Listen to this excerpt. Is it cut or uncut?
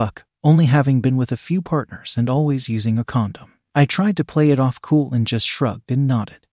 uncut